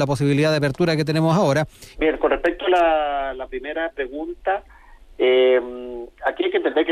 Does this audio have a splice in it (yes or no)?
yes